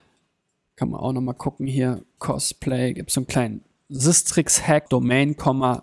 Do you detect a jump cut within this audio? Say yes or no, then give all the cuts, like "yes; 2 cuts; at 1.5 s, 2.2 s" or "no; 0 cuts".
yes; 1 cut; at 4.9 s